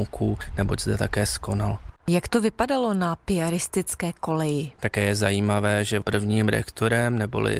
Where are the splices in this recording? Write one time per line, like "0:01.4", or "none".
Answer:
0:04.7